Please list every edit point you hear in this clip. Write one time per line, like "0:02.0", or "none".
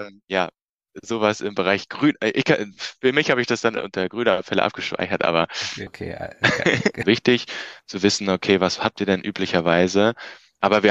0:05.9
0:07.0

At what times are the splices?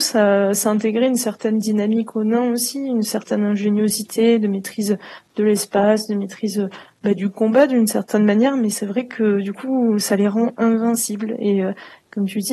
none

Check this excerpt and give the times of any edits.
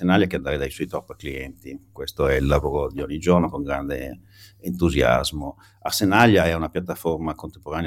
none

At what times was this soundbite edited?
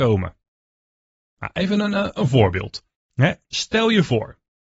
none

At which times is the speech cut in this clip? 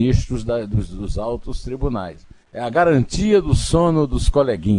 0:02.4

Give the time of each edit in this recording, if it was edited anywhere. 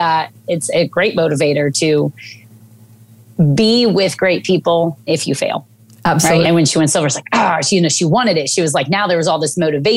0:05.1
0:06.4

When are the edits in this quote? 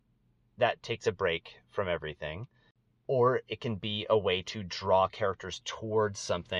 none

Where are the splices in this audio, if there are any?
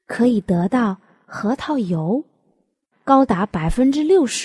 0:02.9

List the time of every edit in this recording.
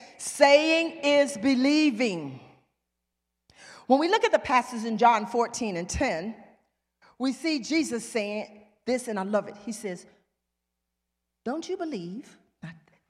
none

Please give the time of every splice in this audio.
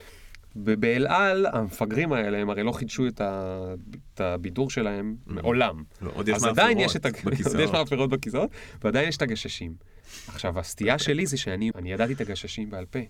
0:10.0
0:11.7

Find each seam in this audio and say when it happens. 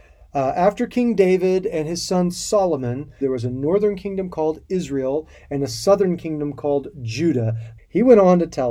0:03.2
0:07.8

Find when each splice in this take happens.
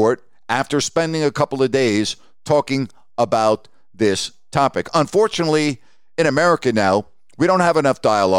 none

